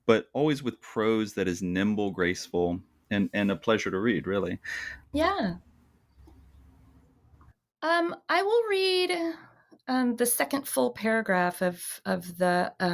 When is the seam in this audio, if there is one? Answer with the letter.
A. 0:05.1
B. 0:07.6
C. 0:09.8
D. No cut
A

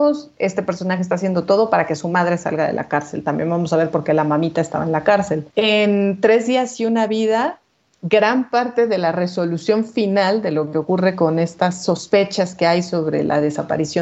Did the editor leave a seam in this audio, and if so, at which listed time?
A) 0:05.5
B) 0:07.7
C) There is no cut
A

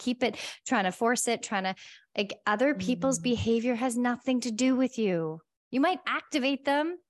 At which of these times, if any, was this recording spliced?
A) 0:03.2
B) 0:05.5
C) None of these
C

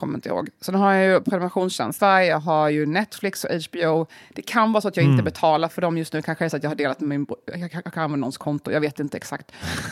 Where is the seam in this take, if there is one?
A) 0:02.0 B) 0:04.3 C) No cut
A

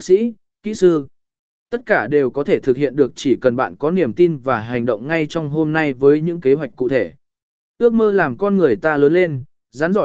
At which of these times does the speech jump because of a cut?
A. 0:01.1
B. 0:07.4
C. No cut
C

